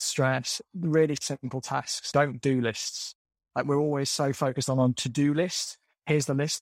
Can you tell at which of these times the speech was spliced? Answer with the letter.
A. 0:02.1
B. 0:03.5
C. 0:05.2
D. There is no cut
A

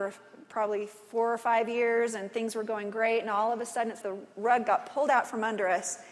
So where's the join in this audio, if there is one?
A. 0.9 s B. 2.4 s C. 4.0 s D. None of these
C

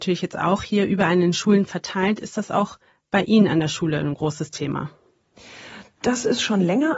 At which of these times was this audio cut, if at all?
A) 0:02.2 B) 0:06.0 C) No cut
C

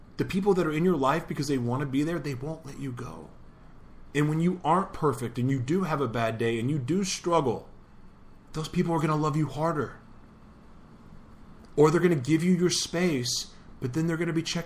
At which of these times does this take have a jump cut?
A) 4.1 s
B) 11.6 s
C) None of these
C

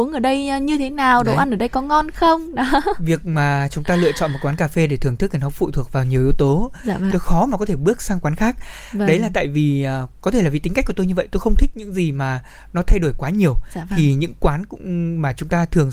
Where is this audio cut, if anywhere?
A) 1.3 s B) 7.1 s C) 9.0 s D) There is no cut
B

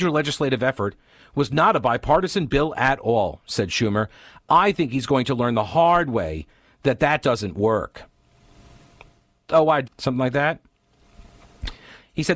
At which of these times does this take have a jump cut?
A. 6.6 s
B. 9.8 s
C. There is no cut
B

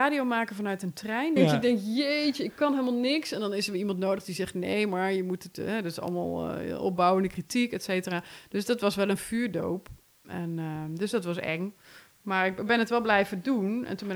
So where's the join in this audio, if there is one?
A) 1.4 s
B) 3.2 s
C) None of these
A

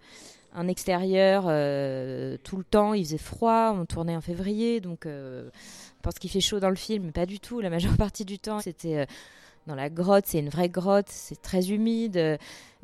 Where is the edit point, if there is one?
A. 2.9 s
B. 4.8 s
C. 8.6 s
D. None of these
C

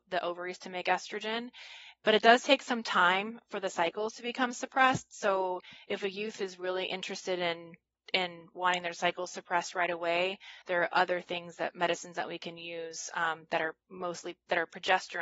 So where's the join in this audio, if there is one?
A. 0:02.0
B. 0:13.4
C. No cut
C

